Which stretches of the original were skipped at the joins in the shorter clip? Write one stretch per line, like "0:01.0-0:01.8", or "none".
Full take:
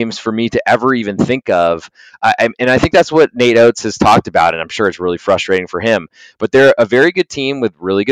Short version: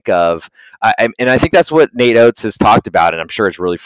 none